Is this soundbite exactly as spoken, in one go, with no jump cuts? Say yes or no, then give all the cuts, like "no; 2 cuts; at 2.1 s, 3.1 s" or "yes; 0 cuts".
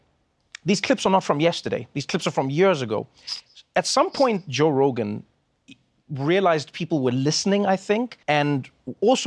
no; 1 cut; at 8.2 s